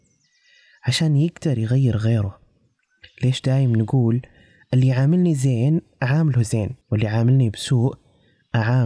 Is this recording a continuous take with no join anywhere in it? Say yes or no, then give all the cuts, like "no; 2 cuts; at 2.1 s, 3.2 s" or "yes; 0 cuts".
no; 1 cut; at 6.8 s